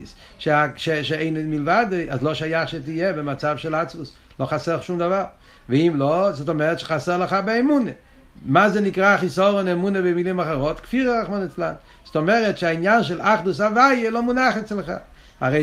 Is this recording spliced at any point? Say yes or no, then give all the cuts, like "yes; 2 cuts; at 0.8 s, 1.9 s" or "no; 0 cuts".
no; 0 cuts